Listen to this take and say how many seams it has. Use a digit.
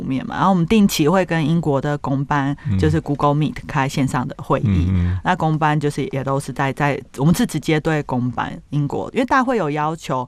0